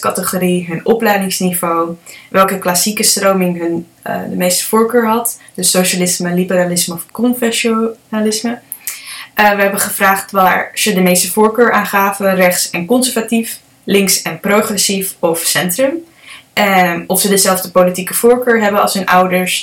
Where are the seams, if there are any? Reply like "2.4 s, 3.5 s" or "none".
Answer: none